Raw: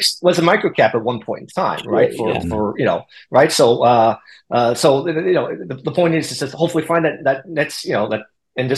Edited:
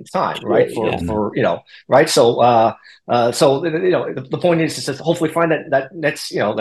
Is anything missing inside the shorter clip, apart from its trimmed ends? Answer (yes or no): yes